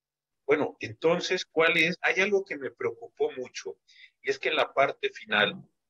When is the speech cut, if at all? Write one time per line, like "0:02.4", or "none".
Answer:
0:02.0